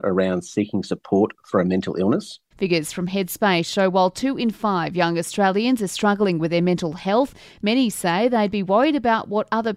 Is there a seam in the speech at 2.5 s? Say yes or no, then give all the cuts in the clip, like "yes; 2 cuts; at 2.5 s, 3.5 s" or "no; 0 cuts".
yes; 1 cut; at 2.5 s